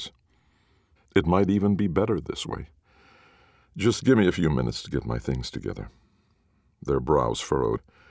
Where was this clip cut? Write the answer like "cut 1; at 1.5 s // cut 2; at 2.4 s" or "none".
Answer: cut 1; at 1.0 s